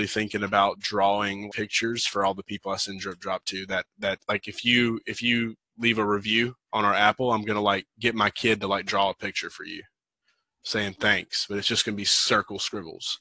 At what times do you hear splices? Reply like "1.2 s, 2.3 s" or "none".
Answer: 1.5 s